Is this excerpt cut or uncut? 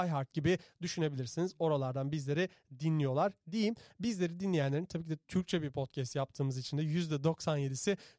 cut